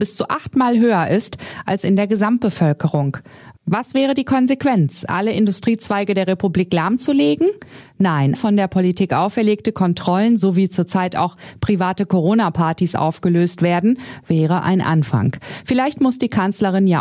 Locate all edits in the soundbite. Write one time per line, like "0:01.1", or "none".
0:08.3